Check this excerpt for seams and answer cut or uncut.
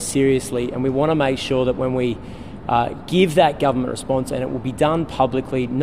uncut